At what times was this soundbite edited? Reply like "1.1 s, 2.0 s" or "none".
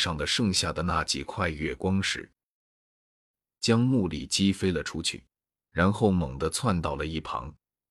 3.5 s